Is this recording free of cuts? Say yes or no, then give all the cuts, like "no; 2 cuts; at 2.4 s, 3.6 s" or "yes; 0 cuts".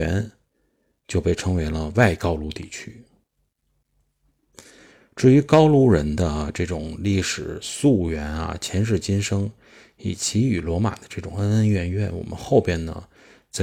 yes; 0 cuts